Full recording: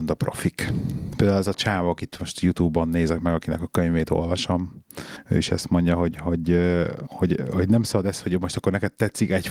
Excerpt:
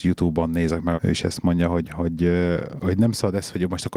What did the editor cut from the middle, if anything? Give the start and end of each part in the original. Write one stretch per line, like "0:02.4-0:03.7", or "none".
0:03.3-0:05.2
0:07.1-0:07.5